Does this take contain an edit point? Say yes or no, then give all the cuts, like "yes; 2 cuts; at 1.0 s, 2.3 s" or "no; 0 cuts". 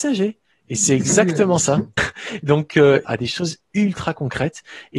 yes; 2 cuts; at 2.0 s, 3.0 s